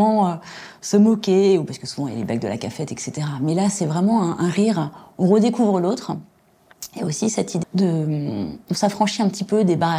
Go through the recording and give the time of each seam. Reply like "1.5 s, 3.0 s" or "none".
7.6 s